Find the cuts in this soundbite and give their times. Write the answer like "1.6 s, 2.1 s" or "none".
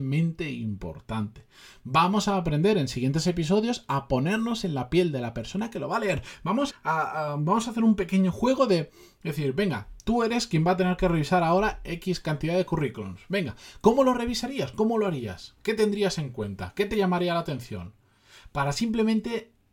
6.7 s

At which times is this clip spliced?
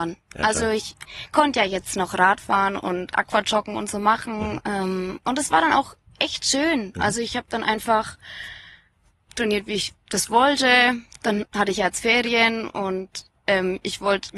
none

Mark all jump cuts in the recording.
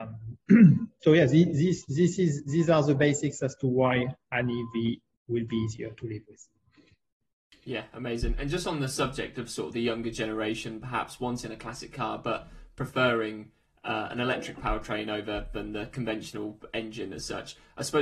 none

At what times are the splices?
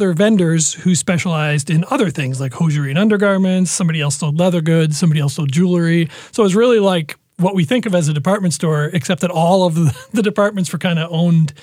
none

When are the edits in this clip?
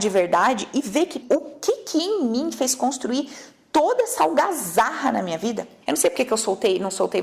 1.2 s, 5.8 s

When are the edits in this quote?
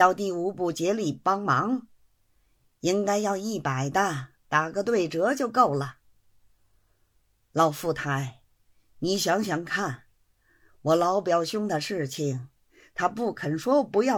none

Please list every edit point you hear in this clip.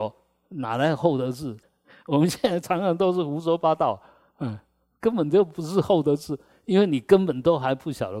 1.6 s

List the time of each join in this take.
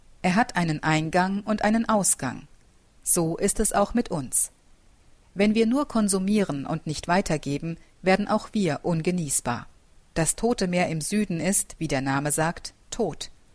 3.0 s, 10.1 s

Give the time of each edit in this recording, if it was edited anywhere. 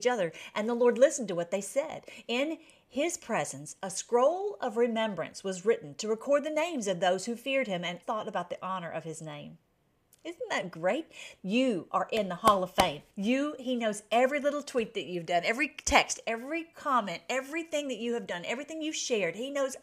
8.0 s, 11.4 s, 13.1 s

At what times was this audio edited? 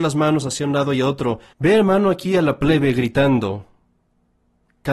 1.5 s

